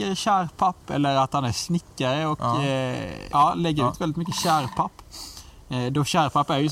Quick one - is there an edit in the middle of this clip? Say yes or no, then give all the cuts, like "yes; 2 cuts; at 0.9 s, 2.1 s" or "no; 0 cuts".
yes; 1 cut; at 3.3 s